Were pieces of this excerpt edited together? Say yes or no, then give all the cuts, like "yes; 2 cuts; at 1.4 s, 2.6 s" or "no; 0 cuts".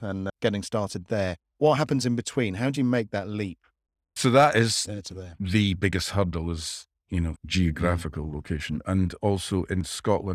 yes; 1 cut; at 7.3 s